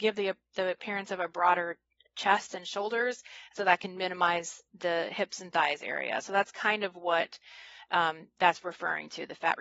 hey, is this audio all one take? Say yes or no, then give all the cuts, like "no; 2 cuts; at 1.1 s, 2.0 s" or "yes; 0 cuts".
yes; 0 cuts